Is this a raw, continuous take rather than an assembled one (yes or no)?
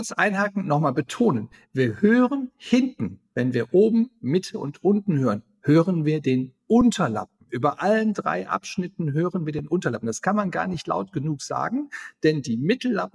yes